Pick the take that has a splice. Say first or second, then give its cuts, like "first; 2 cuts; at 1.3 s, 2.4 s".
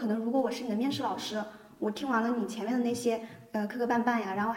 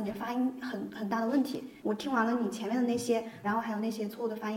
second; 2 cuts; at 1.8 s, 3.4 s